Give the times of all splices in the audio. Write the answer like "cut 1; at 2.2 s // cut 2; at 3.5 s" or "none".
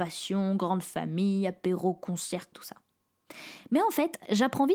cut 1; at 2.5 s